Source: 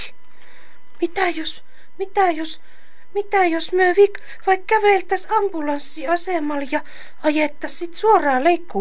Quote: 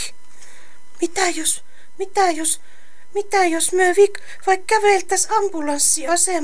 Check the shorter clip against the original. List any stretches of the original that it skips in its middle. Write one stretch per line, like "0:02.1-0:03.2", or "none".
none